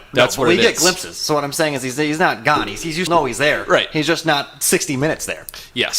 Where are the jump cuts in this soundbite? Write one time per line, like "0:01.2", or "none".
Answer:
0:03.1